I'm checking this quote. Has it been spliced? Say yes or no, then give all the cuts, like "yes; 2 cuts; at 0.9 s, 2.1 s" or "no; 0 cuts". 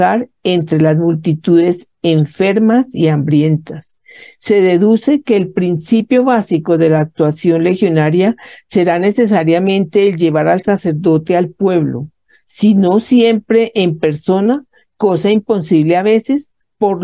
no; 0 cuts